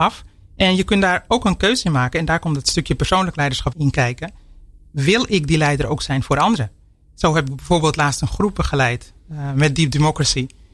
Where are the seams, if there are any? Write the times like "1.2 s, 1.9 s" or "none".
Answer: 3.7 s